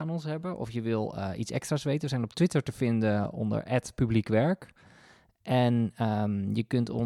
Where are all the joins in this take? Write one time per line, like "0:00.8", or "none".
none